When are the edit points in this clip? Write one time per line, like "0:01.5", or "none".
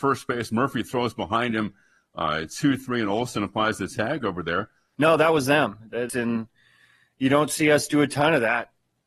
0:04.9
0:06.1

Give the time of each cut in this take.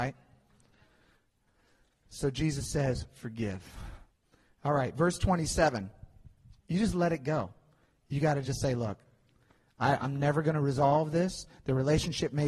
0:06.6

